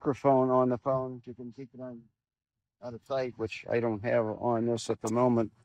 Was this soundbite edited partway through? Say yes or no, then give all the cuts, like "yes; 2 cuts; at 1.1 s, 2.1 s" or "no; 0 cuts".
yes; 1 cut; at 1.2 s